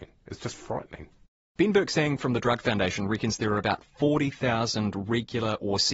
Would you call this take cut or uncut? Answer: uncut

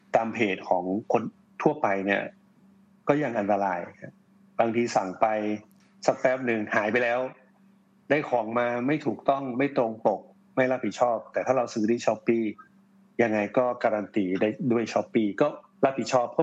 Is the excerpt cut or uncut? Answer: uncut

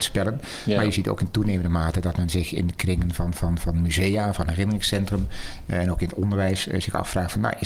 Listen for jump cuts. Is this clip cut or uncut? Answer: uncut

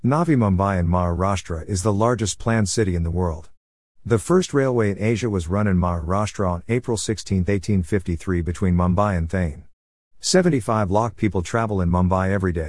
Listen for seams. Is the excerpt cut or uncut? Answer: uncut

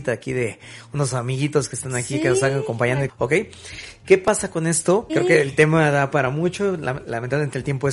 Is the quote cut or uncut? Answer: cut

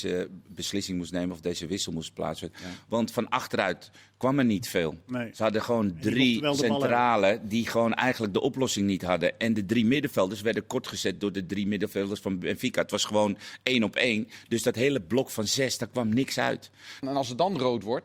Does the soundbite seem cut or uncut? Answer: cut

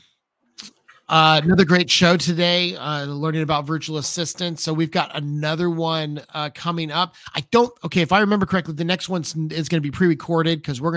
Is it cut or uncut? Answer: uncut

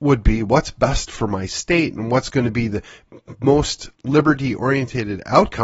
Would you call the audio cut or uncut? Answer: cut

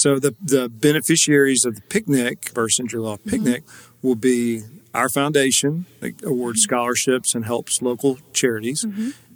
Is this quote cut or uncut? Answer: cut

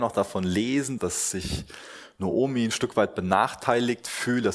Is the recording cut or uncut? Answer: cut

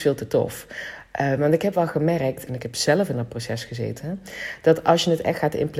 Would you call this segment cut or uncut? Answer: cut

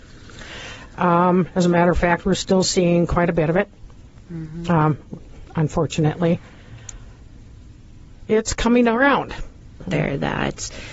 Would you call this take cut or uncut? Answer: cut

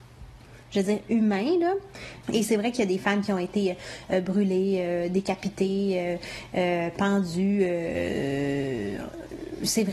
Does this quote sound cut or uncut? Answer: cut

